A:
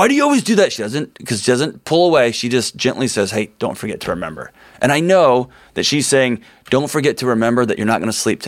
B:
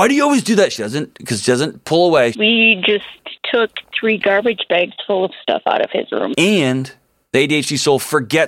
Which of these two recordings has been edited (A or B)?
B